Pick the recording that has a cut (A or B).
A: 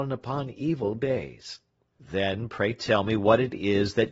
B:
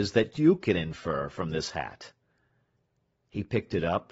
A